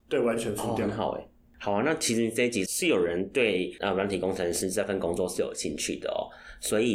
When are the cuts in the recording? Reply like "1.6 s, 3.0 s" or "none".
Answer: 2.7 s